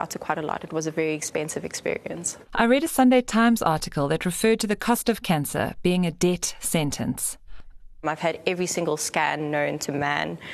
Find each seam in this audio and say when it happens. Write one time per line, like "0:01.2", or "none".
0:02.4
0:08.0

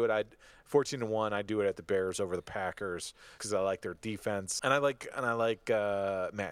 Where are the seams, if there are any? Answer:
0:03.4
0:04.6

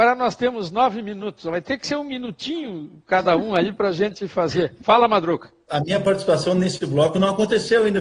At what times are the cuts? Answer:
0:05.7

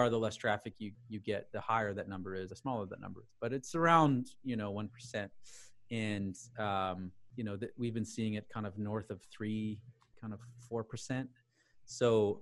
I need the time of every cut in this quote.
0:02.5

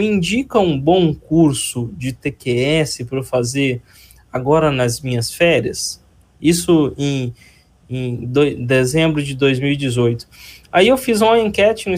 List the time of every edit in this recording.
none

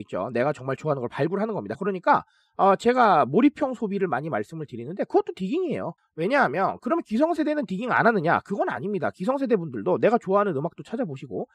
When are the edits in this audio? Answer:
0:01.7
0:06.0

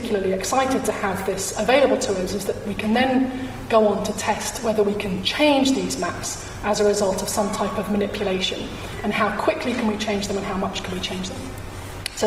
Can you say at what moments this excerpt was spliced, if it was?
none

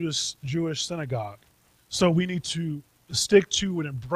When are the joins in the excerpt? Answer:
0:01.8

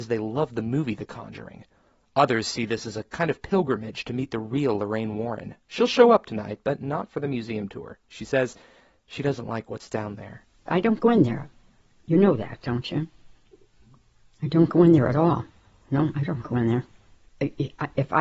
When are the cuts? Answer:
none

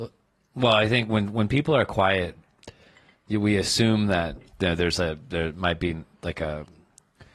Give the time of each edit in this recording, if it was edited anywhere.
0:04.5

